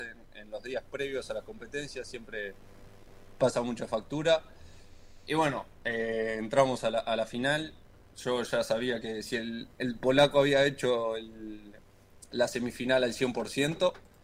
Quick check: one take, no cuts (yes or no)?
yes